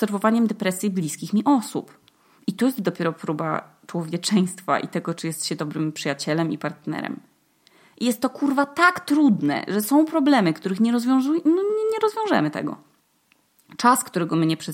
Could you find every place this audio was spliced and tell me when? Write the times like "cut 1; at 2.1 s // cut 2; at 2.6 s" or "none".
none